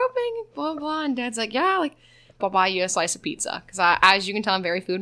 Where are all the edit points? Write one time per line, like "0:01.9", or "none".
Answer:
0:02.4